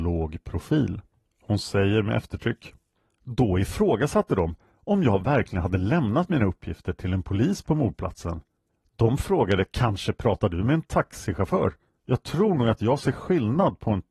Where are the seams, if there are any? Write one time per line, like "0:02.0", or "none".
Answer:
0:01.3